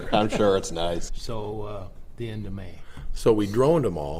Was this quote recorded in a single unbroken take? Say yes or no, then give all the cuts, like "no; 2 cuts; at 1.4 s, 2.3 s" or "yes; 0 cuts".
no; 2 cuts; at 1.1 s, 2.1 s